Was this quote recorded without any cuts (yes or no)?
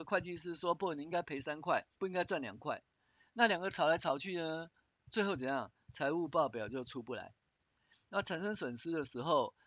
no